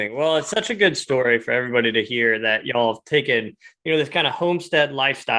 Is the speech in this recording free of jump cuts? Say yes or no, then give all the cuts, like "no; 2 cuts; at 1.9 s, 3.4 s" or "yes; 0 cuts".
yes; 0 cuts